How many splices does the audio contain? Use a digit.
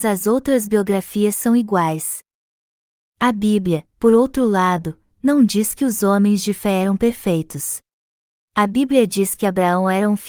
1